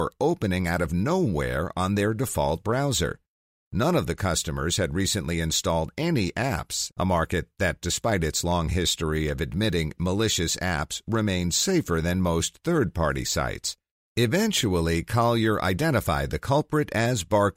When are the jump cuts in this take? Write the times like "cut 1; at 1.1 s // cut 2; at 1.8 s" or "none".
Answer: cut 1; at 3.7 s // cut 2; at 6.9 s